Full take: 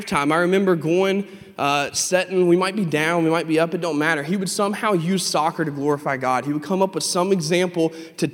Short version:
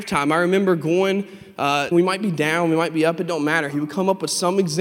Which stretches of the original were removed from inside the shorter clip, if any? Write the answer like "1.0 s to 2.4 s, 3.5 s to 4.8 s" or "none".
1.9 s to 2.5 s, 4.2 s to 6.4 s